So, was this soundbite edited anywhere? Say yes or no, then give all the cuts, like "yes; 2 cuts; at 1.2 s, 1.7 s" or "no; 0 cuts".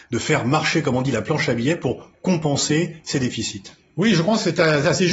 no; 0 cuts